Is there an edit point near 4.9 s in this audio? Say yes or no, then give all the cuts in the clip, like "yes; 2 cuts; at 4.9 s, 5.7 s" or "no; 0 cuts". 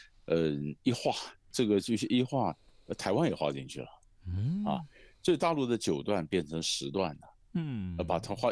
no; 1 cut; at 1.5 s